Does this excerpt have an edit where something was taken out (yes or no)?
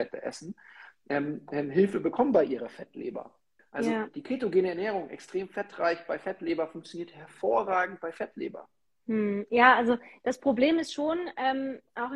yes